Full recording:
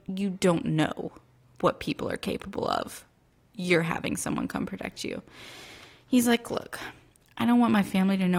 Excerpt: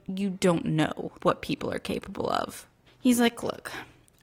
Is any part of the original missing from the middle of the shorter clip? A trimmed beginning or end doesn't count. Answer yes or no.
yes